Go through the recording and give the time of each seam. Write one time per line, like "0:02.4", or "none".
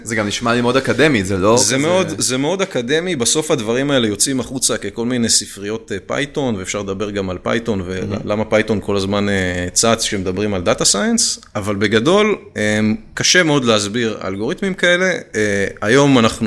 none

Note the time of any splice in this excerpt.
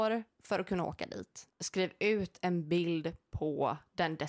0:01.5

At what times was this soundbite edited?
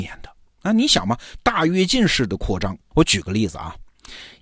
0:02.9

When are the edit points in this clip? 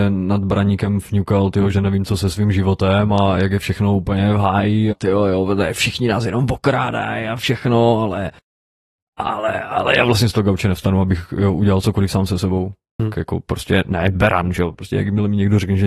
0:13.0
0:14.7

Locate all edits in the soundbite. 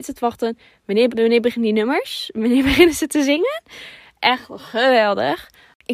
0:01.1

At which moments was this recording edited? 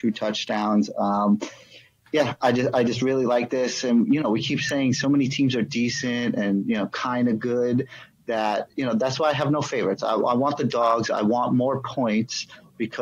none

